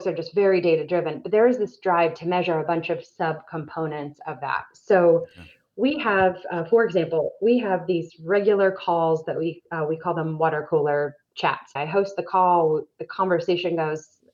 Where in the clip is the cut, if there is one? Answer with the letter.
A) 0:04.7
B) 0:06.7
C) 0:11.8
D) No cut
C